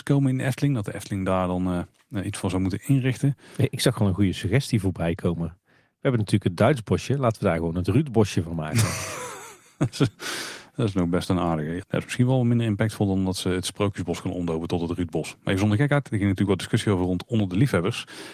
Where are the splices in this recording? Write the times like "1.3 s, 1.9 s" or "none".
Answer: none